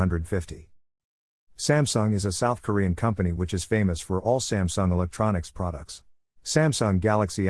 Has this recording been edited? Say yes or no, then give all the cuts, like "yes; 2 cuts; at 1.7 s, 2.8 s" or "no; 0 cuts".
yes; 2 cuts; at 1.3 s, 6.4 s